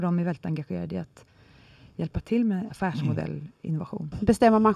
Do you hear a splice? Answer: yes; 1 cut; at 2.7 s

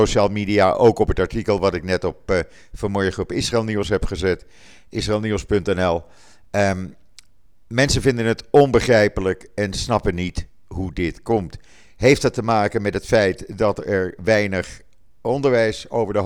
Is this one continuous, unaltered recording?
yes; 0 cuts

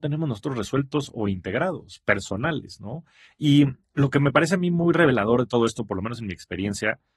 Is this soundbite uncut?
no; 1 cut; at 3.8 s

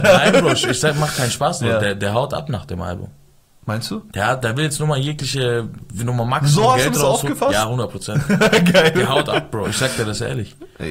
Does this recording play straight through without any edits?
yes; 0 cuts

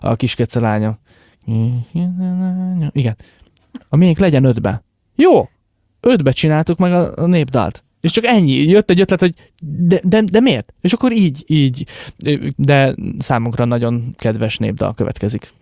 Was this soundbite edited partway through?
yes; 2 cuts; at 10.7 s, 12.5 s

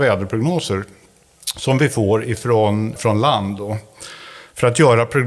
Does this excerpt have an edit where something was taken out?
yes; 1 cut; at 3.0 s

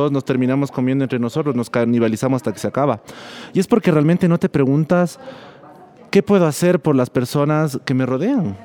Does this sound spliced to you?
no; 0 cuts

